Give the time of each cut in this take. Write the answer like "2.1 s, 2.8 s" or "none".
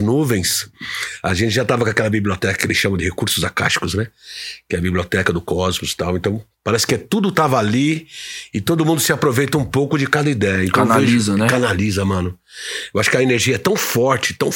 none